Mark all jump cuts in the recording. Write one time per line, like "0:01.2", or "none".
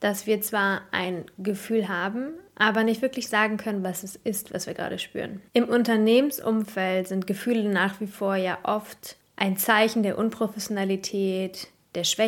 0:05.5